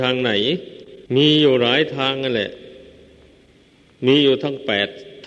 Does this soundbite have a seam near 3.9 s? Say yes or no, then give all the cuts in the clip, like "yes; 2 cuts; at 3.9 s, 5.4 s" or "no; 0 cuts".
no; 1 cut; at 1.1 s